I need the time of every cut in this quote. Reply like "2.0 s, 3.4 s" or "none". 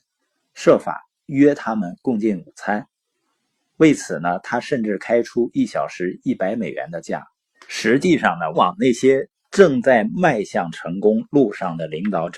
7.5 s, 8.5 s